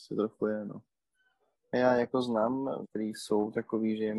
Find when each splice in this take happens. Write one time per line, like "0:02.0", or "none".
0:01.5
0:02.8